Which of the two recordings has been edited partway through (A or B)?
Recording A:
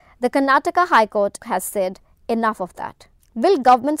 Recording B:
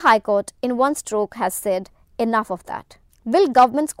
A